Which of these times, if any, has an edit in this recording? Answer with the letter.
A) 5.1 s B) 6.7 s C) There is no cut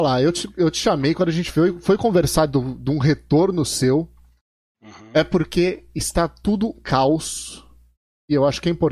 B